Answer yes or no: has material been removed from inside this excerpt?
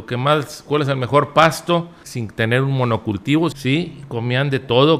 yes